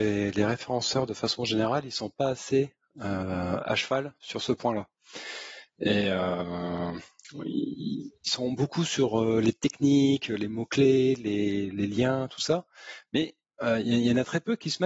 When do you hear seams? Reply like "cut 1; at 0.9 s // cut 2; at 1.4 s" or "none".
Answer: none